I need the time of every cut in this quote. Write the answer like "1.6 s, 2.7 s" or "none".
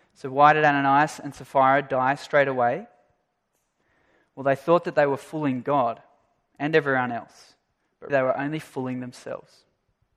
8.1 s